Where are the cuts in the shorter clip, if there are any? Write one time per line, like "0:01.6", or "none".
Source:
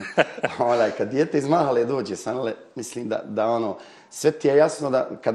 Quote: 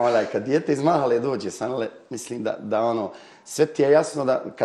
none